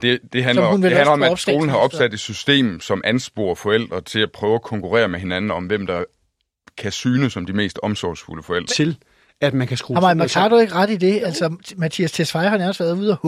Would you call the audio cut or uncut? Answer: cut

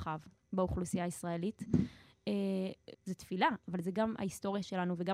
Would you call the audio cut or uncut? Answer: cut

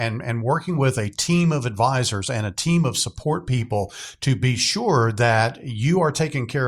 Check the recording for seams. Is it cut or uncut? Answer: uncut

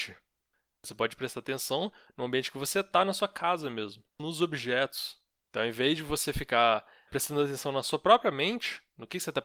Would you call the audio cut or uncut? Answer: cut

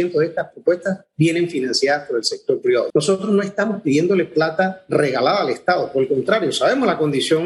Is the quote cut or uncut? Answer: cut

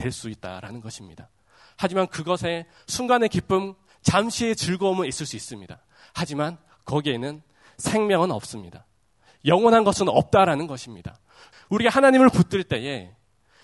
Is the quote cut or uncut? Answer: cut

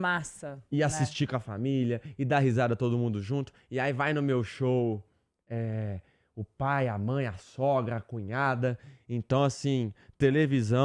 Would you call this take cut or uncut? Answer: uncut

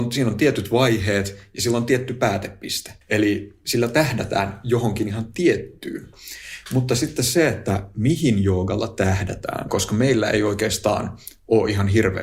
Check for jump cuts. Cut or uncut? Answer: cut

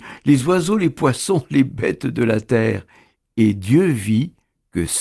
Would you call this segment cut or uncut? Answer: uncut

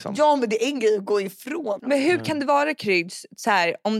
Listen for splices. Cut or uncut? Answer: cut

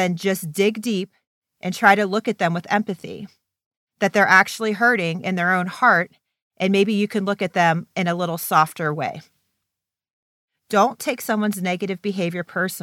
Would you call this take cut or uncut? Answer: uncut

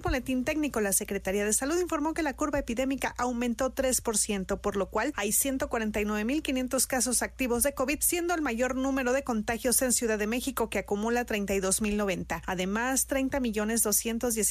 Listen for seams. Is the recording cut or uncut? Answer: uncut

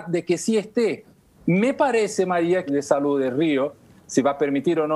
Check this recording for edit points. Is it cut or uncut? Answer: cut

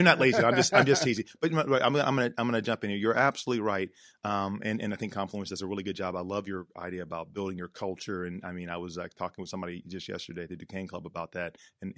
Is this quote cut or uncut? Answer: uncut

